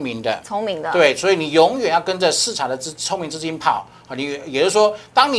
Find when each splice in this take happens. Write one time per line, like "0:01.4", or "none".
none